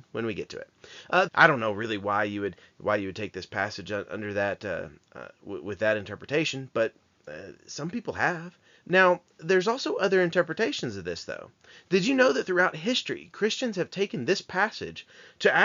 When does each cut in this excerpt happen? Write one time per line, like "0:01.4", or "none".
0:01.3
0:08.7